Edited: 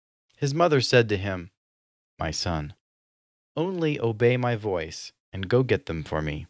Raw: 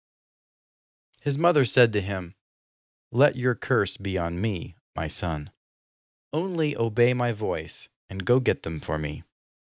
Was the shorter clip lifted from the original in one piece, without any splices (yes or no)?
no